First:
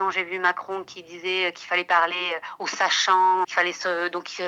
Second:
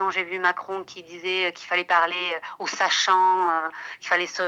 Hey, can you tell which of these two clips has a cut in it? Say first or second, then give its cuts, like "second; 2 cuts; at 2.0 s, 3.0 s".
first; 1 cut; at 3.4 s